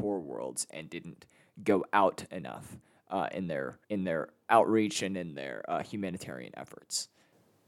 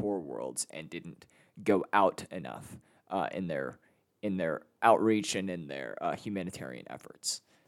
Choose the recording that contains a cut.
first; 1 cut; at 3.8 s

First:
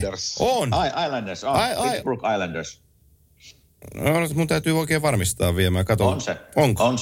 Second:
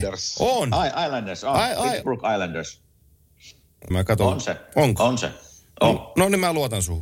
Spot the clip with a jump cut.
second; 1 cut; at 3.9 s

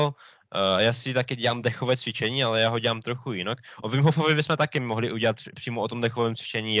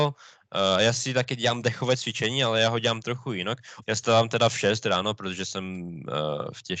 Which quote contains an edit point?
second; 1 cut; at 3.8 s

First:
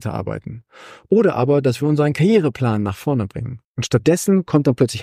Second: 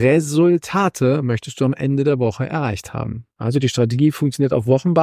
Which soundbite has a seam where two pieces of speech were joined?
first; 1 cut; at 3.6 s

